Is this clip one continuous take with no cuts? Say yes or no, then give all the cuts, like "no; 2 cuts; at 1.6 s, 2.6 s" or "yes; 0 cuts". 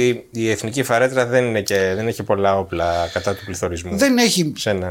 yes; 0 cuts